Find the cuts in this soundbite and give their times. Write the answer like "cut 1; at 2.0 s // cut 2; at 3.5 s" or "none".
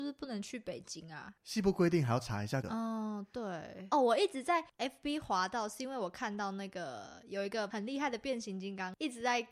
cut 1; at 2.6 s // cut 2; at 3.9 s